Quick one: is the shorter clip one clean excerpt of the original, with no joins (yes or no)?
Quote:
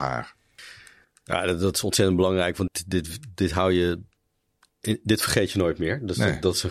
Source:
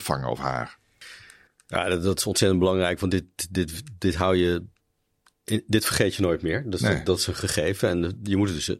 no